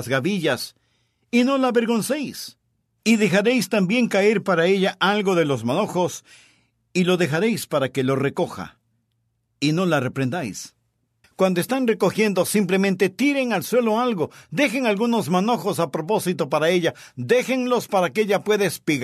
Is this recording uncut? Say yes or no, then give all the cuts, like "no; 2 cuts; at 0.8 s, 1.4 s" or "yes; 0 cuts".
no; 1 cut; at 11.2 s